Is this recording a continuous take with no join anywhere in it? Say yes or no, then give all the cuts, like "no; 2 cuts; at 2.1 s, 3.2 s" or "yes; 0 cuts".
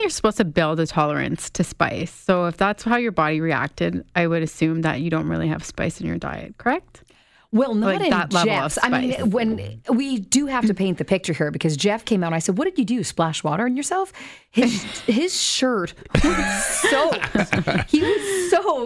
yes; 0 cuts